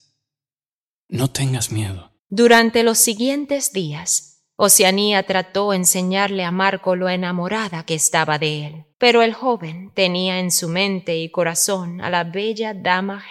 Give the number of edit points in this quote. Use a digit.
2